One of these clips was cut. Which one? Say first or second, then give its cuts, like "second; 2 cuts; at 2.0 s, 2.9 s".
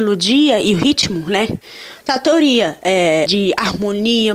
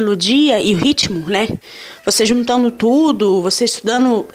first; 2 cuts; at 2.0 s, 3.3 s